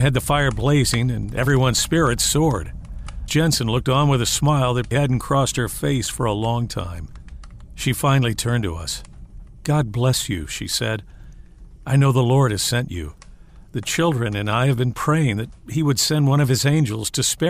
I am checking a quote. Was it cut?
yes; 2 cuts; at 3.3 s, 4.9 s

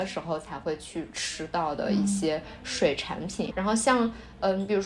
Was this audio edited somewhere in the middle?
yes; 1 cut; at 3.5 s

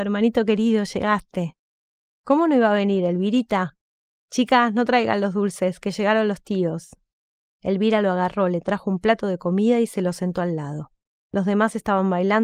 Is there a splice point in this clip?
yes; 1 cut; at 7.5 s

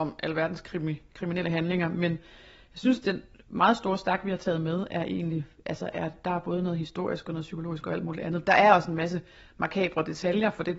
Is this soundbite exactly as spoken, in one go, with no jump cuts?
yes; 0 cuts

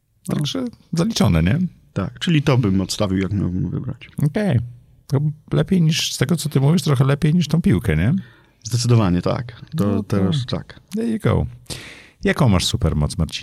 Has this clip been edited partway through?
no; 0 cuts

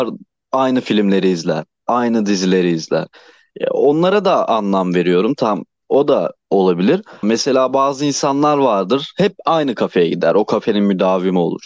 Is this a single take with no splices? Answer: no; 1 cut; at 7.2 s

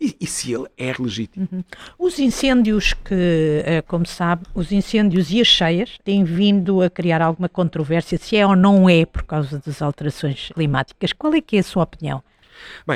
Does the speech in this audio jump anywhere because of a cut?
yes; 3 cuts; at 0.9 s, 6.0 s, 10.5 s

